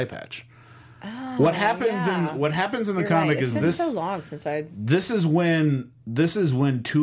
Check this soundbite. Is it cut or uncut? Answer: uncut